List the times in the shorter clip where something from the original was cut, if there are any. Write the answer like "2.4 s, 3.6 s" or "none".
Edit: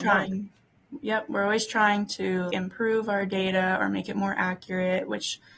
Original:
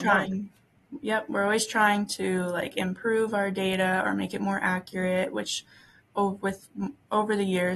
2.5 s